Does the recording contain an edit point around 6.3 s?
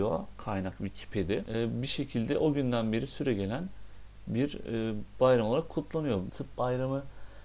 yes; 1 cut; at 6.3 s

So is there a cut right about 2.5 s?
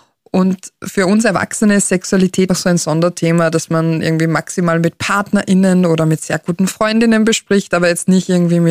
yes; 1 cut; at 2.5 s

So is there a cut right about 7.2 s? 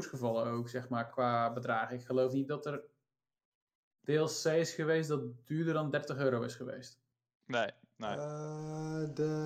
no; 1 cut; at 1.1 s

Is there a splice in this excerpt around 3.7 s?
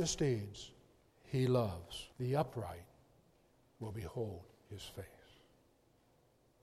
no; 1 cut; at 2.1 s

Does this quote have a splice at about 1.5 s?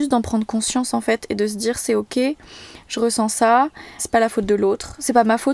no; 1 cut; at 4.0 s

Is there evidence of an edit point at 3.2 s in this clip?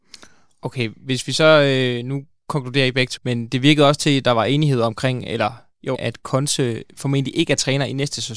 yes; 2 cuts; at 3.2 s, 5.9 s

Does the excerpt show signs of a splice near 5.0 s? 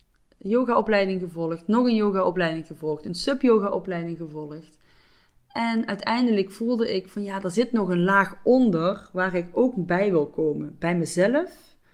no; 0 cuts

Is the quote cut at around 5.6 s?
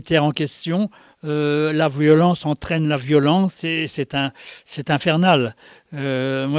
no; 0 cuts

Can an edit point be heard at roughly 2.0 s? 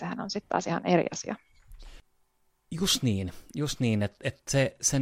no; 0 cuts

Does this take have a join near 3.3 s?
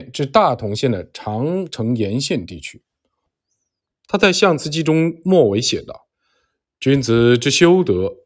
yes; 2 cuts; at 3.3 s, 6.1 s

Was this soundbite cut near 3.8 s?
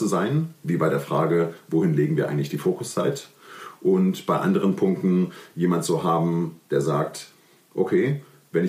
no; 0 cuts

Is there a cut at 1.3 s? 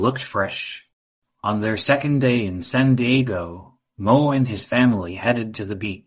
yes; 1 cut; at 1.3 s

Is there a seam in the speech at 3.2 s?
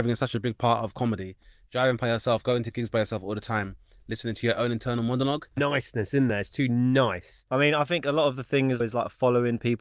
no; 2 cuts; at 5.6 s, 8.8 s

